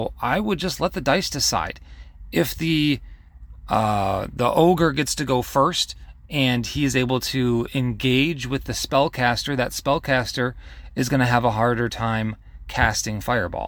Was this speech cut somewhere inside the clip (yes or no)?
no